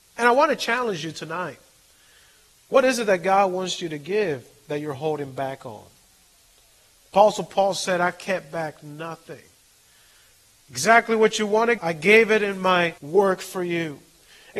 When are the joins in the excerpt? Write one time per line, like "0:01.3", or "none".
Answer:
0:11.8
0:13.0